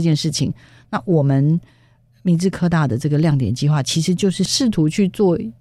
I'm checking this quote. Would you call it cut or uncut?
uncut